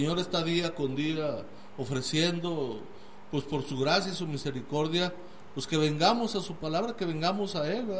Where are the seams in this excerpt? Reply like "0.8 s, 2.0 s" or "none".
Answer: none